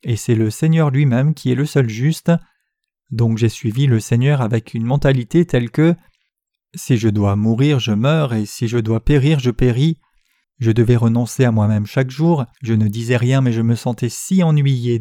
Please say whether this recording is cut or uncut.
cut